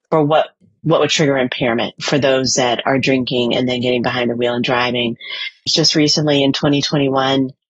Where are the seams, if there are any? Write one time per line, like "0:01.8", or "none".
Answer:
0:05.7